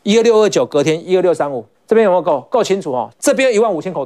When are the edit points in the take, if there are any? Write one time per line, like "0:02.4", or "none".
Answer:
0:01.7
0:03.1